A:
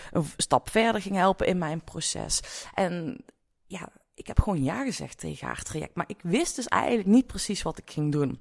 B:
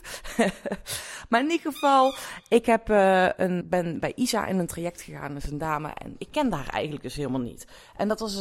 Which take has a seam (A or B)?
B